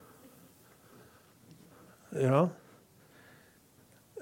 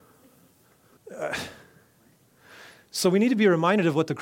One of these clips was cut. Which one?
second; 1 cut; at 1.0 s

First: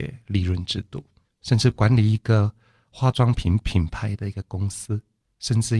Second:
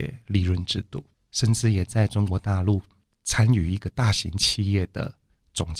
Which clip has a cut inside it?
second; 1 cut; at 1.1 s

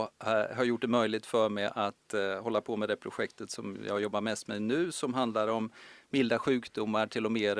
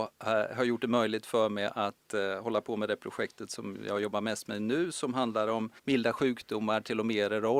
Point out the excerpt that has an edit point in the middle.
second; 1 cut; at 5.8 s

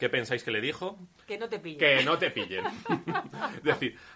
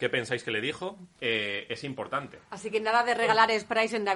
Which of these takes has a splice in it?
second; 1 cut; at 1.2 s

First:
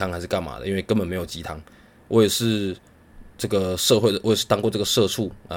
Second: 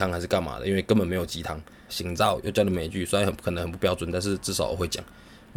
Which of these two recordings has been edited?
second; 1 cut; at 1.9 s

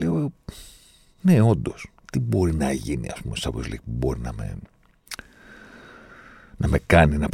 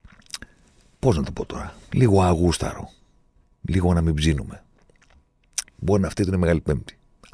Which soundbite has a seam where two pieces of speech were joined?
second; 1 cut; at 5.7 s

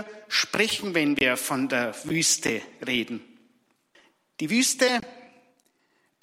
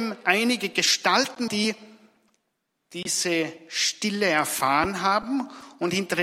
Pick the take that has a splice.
second; 1 cut; at 1.5 s

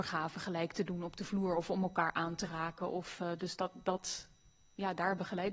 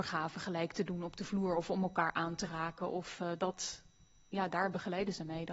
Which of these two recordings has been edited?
second; 1 cut; at 3.4 s

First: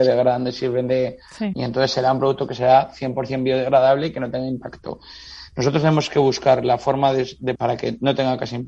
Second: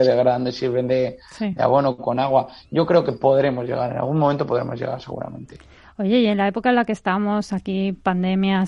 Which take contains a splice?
first; 2 cuts; at 1.5 s, 7.5 s

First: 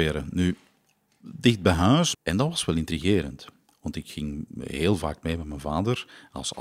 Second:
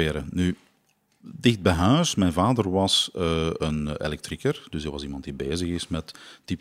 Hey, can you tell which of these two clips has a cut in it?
first; 1 cut; at 2.1 s

